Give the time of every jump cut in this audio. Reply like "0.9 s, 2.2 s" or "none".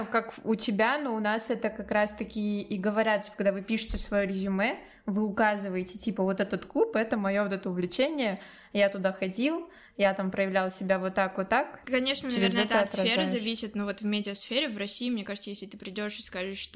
none